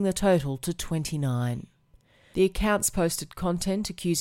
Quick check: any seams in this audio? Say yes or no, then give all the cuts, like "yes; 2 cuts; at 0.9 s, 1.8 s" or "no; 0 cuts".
yes; 1 cut; at 2.3 s